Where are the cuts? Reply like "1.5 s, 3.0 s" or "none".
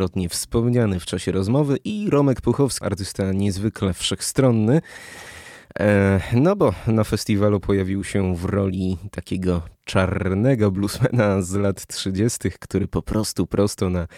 2.8 s